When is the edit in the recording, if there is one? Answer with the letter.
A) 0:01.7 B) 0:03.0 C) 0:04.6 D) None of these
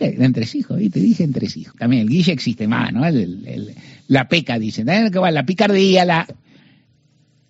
A